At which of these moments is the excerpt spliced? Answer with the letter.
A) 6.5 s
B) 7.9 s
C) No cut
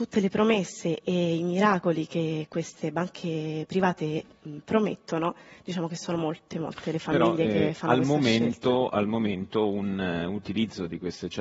A